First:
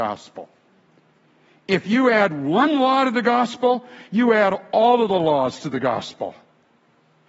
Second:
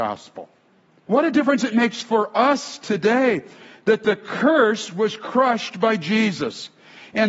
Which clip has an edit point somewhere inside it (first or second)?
second